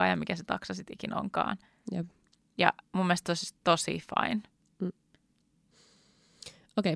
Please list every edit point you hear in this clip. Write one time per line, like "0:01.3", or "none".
none

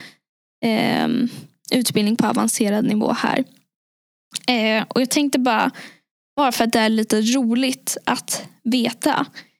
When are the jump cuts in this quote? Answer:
none

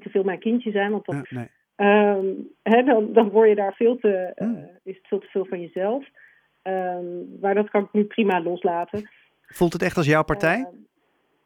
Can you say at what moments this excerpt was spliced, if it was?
0:01.2
0:09.4

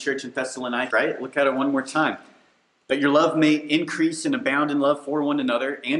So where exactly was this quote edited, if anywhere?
0:00.9

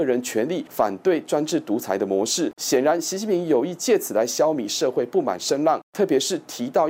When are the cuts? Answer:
0:02.5

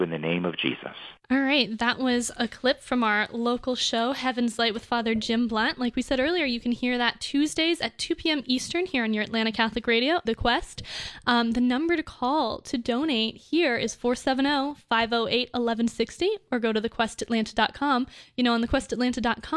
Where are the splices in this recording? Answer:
0:01.2
0:10.3

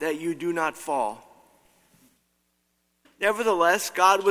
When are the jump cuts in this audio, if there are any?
0:03.0

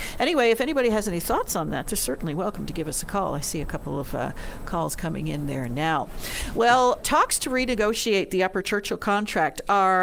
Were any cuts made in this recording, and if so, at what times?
0:07.0

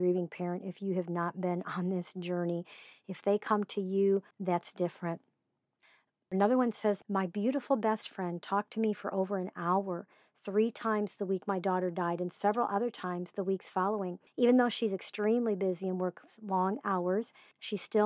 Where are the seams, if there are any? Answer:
0:04.3

